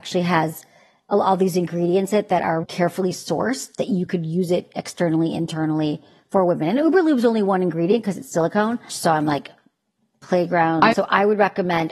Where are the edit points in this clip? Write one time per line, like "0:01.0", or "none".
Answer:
0:02.6
0:08.9
0:10.9